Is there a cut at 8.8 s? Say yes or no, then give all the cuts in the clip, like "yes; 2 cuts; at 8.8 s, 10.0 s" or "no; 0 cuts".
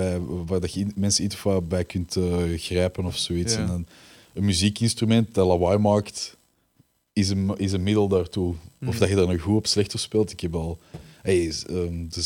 no; 0 cuts